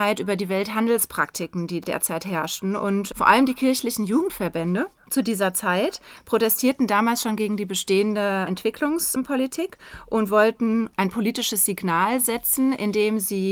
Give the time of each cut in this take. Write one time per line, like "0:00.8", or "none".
none